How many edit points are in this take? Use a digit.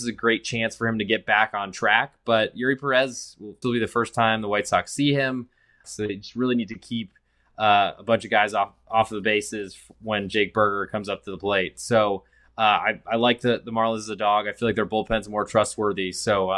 2